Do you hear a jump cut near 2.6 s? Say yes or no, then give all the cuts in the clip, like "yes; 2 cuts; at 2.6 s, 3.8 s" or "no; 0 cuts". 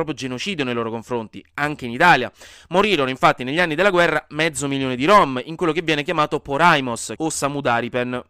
no; 1 cut; at 7.2 s